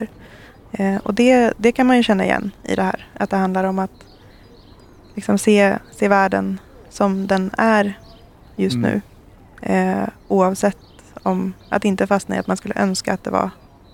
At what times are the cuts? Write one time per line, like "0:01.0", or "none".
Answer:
none